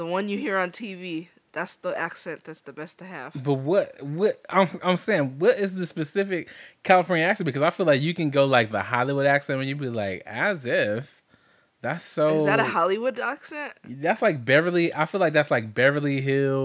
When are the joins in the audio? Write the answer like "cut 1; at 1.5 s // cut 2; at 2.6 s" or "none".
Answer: none